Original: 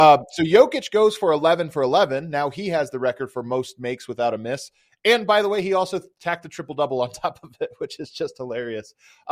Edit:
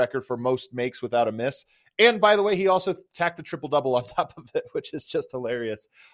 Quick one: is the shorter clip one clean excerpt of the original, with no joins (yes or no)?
yes